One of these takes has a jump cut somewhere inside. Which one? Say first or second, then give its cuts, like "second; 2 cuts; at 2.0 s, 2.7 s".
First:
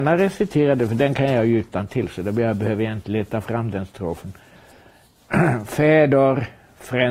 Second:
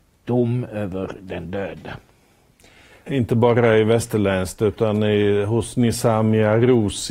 second; 1 cut; at 3.1 s